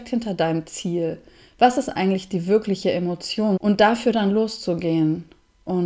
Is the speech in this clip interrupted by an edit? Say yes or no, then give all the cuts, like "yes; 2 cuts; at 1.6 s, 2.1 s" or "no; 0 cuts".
yes; 1 cut; at 3.6 s